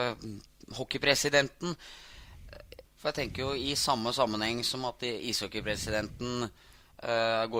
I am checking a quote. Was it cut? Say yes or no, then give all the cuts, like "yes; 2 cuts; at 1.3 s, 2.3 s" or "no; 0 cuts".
yes; 1 cut; at 2.8 s